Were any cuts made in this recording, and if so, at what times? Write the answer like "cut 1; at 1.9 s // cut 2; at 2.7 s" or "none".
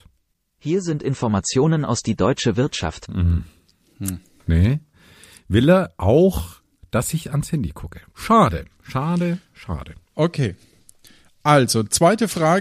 none